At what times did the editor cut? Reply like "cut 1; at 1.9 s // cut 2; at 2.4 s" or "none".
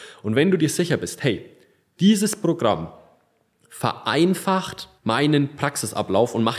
cut 1; at 5.0 s